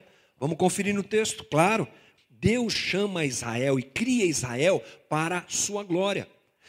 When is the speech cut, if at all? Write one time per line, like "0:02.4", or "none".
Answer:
0:02.2